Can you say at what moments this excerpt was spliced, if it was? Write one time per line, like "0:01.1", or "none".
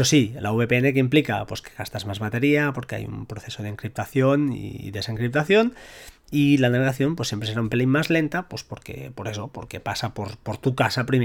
none